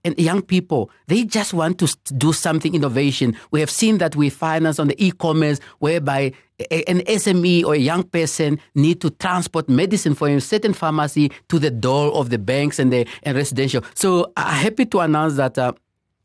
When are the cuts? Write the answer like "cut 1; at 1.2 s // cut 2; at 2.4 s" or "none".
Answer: cut 1; at 13.9 s